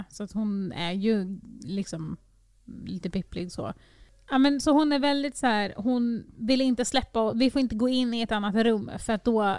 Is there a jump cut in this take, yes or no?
no